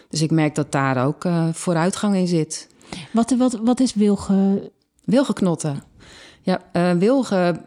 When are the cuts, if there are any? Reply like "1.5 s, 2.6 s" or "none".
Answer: none